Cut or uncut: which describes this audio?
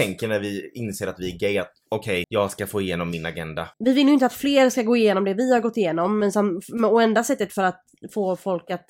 cut